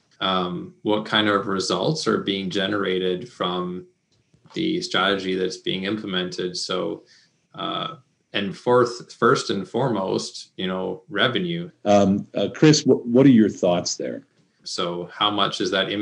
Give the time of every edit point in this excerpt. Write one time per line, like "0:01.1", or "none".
0:11.7
0:14.6